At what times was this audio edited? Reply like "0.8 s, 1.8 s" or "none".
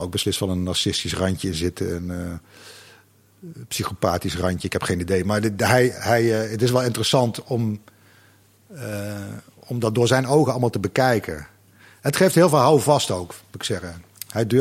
none